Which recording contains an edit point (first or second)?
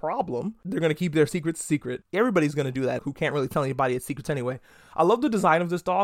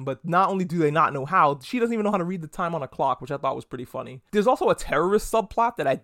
first